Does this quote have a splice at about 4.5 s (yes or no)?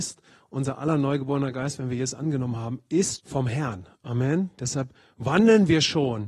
no